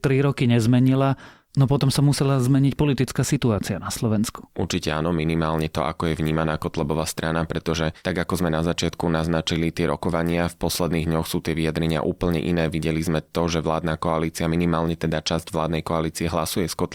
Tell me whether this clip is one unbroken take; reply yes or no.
yes